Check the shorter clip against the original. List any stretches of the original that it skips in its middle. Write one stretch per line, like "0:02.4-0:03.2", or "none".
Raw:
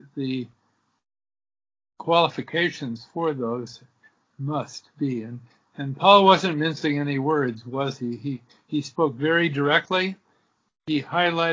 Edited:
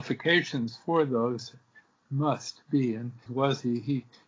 0:05.5-0:07.6